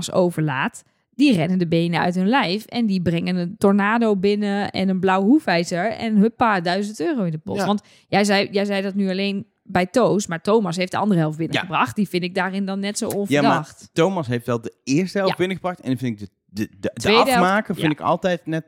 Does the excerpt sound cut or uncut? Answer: uncut